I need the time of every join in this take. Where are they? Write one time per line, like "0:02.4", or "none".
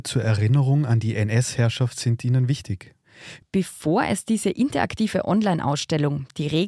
0:03.4